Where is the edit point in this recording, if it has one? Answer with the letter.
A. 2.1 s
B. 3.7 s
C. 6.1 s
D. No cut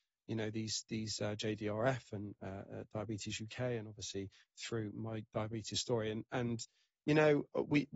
D